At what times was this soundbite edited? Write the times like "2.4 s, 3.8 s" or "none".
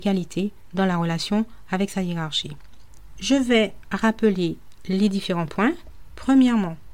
none